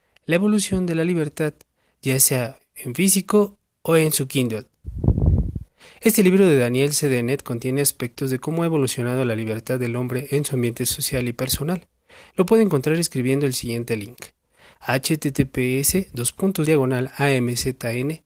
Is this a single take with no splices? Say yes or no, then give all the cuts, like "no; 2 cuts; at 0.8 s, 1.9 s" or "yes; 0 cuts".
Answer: no; 1 cut; at 16.7 s